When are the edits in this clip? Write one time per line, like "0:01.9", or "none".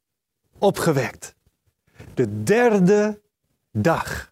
none